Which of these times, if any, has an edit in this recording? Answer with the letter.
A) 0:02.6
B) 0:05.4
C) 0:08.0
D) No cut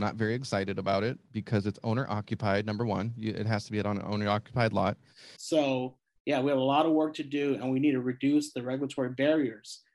B